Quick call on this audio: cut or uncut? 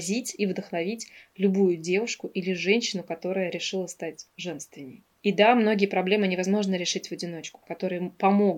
cut